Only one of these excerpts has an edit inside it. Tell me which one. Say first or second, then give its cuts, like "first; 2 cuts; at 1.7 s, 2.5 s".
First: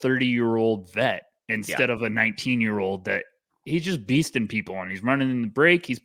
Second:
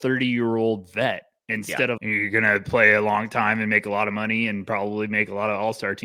second; 1 cut; at 2.0 s